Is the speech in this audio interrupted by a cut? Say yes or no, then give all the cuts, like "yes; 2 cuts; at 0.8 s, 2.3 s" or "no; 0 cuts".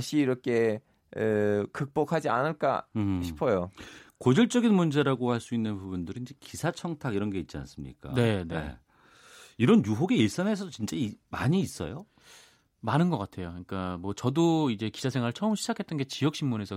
no; 0 cuts